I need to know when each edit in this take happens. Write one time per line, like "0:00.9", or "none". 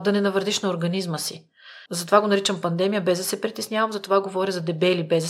0:01.9

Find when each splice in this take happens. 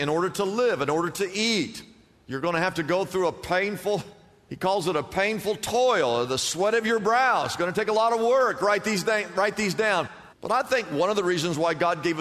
0:08.6
0:10.3

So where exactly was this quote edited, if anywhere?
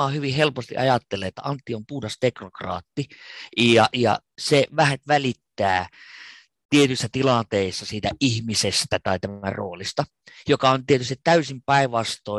none

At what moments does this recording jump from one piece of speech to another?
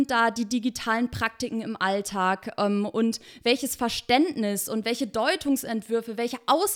none

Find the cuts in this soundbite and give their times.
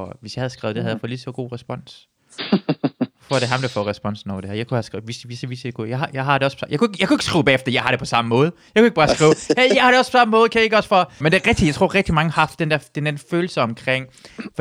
0:11.2

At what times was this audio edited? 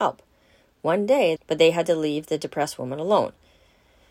0:01.4

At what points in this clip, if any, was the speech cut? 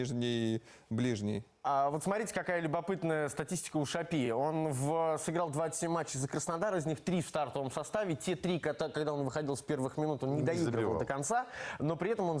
none

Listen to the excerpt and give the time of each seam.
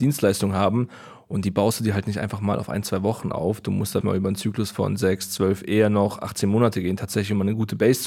0:04.0

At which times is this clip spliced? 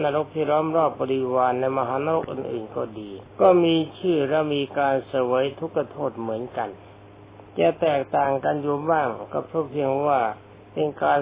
0:03.3
0:07.5

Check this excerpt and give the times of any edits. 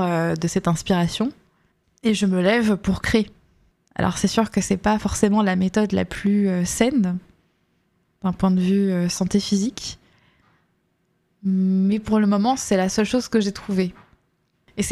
none

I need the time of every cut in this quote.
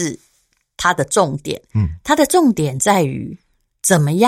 none

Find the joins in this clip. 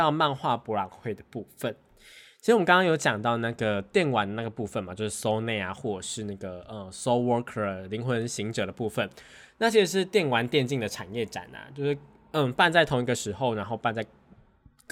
none

